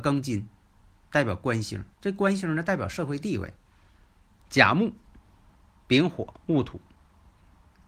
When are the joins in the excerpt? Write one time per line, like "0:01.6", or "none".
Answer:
0:04.4